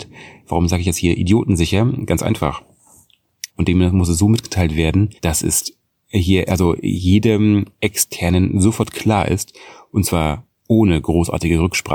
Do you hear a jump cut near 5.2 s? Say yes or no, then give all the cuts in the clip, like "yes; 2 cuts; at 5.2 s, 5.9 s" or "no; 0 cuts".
yes; 2 cuts; at 3.5 s, 5.2 s